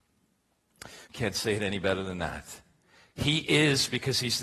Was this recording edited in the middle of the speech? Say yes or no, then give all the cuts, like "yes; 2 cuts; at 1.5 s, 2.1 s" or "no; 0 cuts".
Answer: yes; 1 cut; at 1.1 s